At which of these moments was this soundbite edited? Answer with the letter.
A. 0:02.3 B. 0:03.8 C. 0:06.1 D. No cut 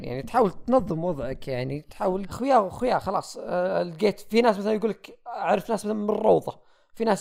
A